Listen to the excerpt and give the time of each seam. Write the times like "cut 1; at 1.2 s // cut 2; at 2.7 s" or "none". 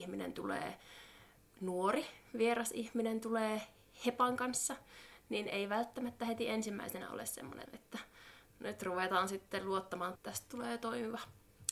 cut 1; at 7.7 s // cut 2; at 10.2 s